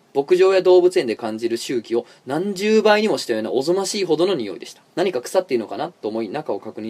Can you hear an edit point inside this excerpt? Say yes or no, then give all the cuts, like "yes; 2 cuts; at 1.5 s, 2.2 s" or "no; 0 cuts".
yes; 1 cut; at 4.9 s